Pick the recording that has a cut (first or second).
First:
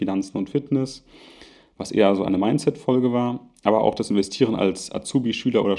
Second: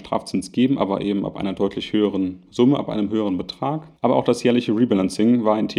second